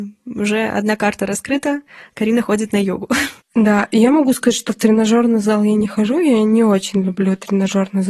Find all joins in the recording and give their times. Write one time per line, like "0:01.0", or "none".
none